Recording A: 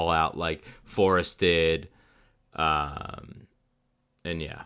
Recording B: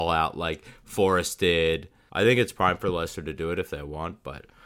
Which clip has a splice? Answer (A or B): B